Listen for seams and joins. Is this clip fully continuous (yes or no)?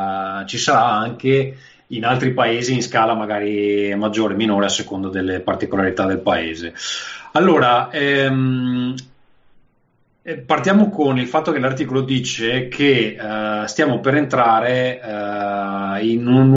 yes